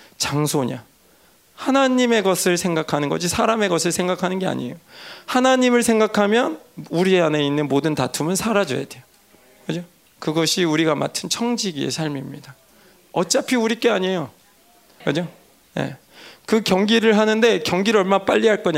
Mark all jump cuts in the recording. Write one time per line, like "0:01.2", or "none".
0:10.0
0:15.0